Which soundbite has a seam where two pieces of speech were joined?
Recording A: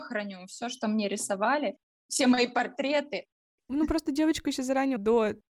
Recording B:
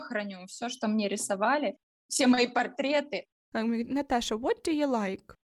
B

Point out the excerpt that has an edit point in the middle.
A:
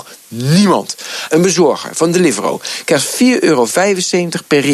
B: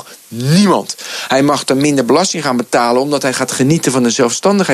A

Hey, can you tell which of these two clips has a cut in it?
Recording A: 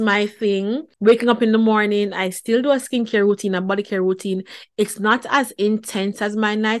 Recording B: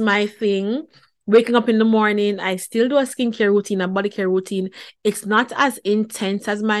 A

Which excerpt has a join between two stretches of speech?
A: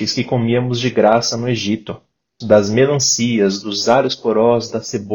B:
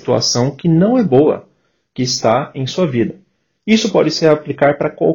A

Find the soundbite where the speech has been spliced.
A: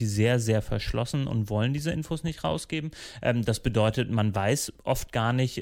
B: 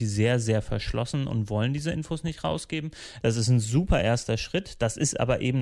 B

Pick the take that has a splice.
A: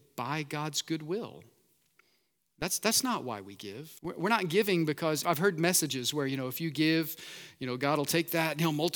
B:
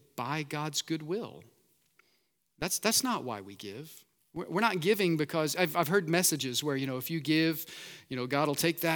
A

